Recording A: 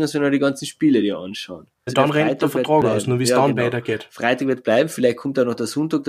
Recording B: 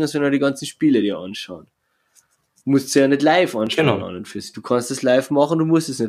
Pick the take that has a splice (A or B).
A